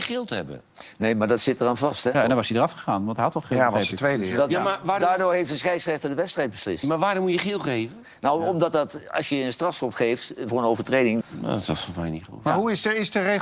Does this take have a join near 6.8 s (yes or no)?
no